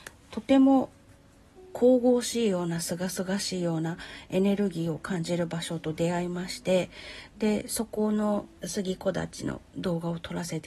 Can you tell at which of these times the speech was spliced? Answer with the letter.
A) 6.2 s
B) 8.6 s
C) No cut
B